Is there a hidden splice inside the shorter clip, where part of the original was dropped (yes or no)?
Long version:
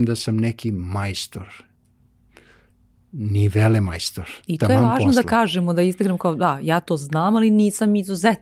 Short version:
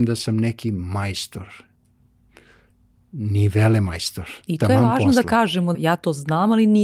yes